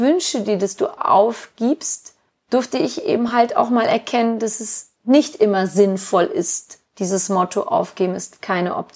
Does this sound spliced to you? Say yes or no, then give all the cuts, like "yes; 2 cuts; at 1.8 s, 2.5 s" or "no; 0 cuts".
no; 0 cuts